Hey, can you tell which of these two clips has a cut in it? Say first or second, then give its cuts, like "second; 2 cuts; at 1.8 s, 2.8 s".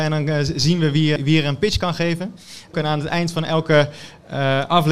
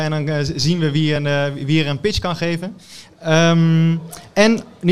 first; 2 cuts; at 1.2 s, 2.7 s